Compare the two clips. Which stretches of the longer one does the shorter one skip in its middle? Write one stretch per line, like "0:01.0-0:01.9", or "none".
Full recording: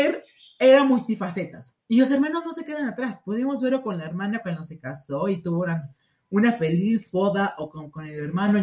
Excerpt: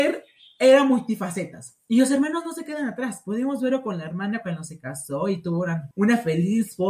0:05.9-0:06.3